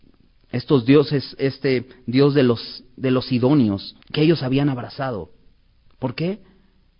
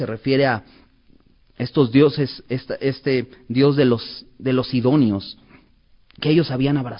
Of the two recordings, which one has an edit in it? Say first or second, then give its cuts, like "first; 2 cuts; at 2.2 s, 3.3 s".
first; 2 cuts; at 1.4 s, 4.0 s